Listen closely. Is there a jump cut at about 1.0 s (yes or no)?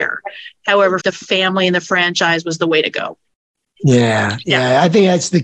yes